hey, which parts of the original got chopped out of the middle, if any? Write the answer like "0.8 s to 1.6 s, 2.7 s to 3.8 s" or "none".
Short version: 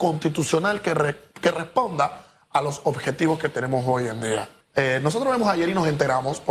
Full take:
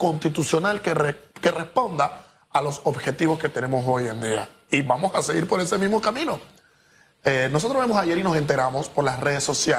4.6 s to 7.1 s